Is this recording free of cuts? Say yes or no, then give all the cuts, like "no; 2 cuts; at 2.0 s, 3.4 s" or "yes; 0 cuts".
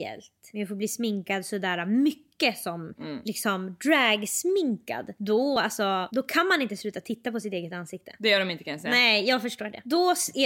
yes; 0 cuts